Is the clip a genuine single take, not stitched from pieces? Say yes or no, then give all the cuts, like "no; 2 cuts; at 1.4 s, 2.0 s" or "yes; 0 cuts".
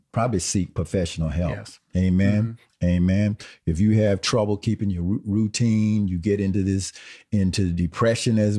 yes; 0 cuts